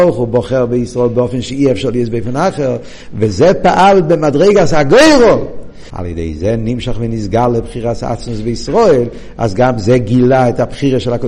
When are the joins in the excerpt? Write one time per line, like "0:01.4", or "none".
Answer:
0:05.9